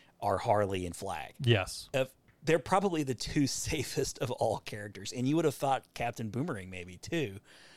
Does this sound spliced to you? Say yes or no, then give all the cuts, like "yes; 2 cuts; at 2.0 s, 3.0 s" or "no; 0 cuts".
no; 0 cuts